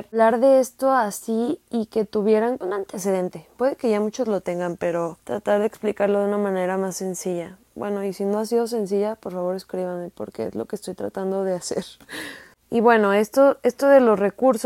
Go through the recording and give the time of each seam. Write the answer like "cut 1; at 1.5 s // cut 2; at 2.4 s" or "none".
none